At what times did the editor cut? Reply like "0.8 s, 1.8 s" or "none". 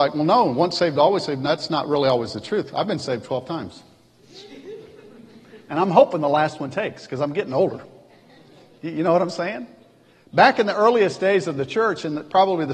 none